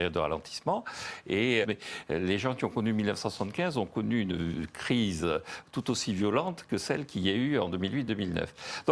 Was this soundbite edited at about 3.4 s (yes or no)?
no